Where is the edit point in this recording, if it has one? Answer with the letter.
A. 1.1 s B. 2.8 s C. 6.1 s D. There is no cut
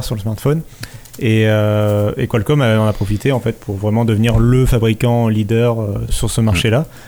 C